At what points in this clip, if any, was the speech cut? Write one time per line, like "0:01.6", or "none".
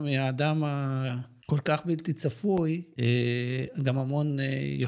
none